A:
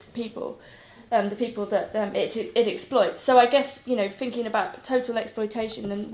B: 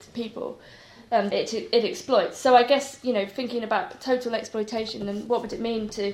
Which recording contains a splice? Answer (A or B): B